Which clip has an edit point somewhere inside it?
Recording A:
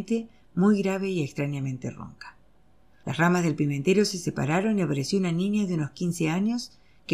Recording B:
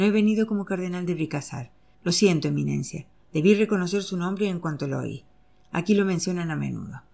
B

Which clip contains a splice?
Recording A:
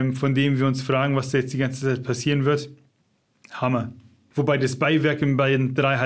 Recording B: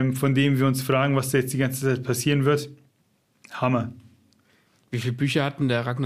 A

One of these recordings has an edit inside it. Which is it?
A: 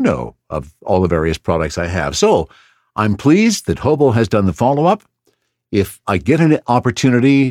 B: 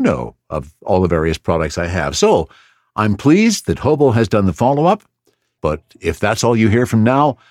B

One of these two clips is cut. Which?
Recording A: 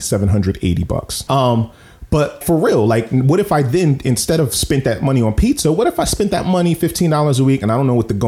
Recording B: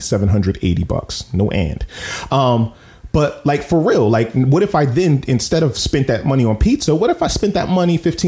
A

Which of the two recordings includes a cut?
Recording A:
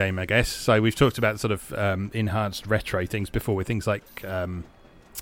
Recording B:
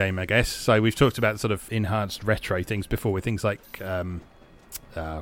B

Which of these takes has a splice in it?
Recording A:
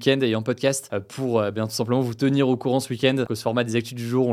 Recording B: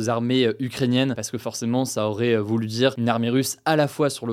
A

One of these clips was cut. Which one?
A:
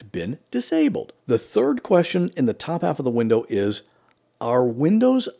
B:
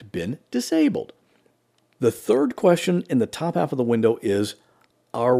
A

